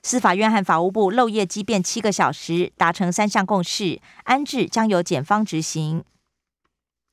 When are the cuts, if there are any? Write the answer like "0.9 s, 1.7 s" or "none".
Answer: none